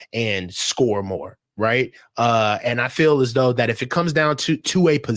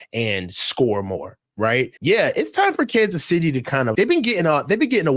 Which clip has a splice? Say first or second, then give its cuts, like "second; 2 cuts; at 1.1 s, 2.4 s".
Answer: second; 2 cuts; at 2.0 s, 3.9 s